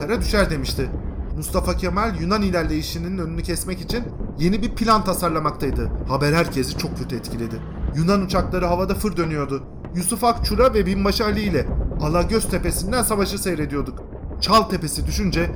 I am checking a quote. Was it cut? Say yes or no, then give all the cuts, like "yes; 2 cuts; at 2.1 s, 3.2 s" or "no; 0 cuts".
yes; 3 cuts; at 1.3 s, 6.0 s, 7.9 s